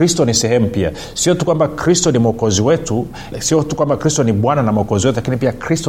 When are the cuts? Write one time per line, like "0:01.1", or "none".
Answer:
0:03.3